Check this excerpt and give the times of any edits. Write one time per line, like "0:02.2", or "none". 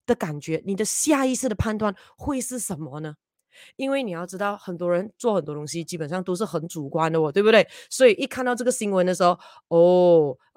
none